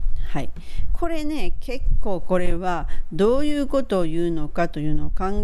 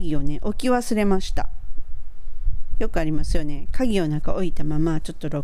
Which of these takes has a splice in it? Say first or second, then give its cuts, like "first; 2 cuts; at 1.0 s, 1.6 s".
second; 1 cut; at 2.7 s